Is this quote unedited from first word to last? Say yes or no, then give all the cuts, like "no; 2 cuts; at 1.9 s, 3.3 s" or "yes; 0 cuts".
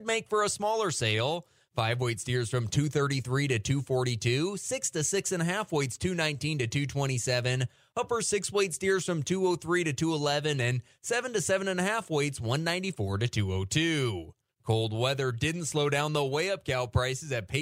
yes; 0 cuts